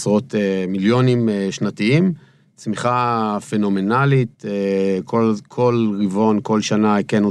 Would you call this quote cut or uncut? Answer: uncut